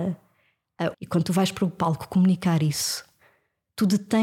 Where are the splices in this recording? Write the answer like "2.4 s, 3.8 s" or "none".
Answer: 0.9 s